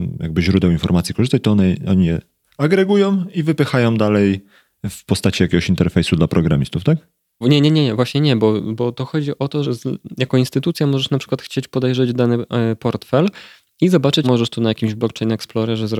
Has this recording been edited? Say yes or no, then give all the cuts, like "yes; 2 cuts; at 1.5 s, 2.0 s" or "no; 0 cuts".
yes; 3 cuts; at 7.4 s, 9.6 s, 14.2 s